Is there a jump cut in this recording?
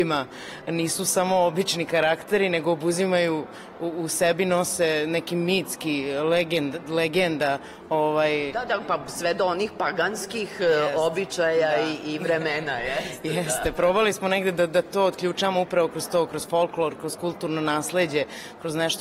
no; 0 cuts

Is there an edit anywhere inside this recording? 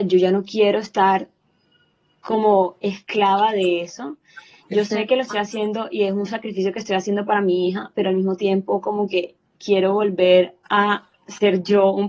no; 0 cuts

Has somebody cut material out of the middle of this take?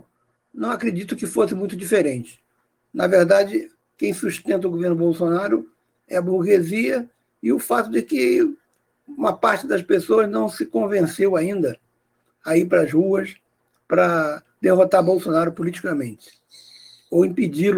no; 0 cuts

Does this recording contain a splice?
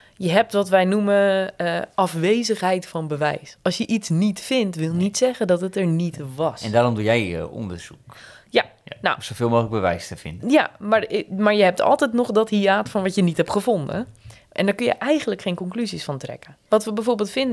no; 0 cuts

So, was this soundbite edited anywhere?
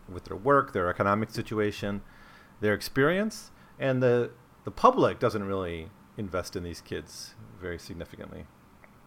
no; 0 cuts

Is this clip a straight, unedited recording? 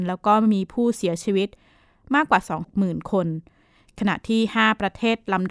no; 1 cut; at 2.6 s

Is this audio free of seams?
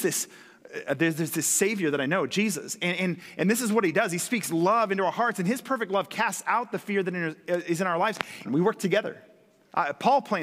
no; 1 cut; at 8.5 s

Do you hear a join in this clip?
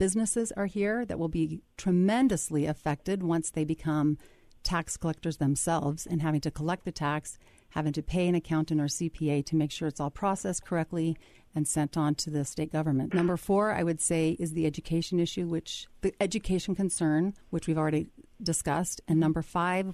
yes; 2 cuts; at 13.1 s, 17.4 s

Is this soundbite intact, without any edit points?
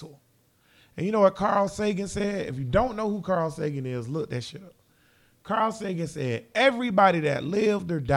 yes; 0 cuts

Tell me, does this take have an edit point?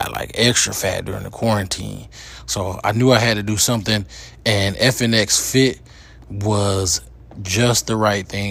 no; 0 cuts

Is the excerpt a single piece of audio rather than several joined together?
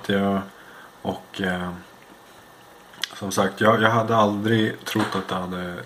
yes; 0 cuts

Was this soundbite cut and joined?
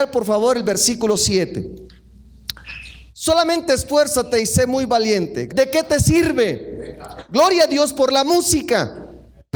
yes; 1 cut; at 5.5 s

